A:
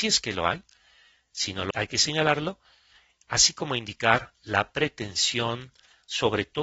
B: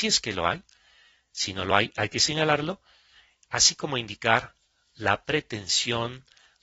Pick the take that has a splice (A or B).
A